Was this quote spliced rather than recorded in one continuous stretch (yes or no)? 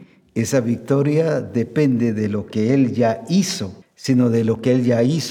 yes